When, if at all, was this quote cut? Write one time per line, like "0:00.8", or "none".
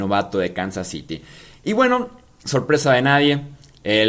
none